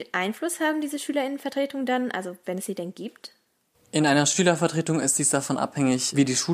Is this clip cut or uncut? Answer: uncut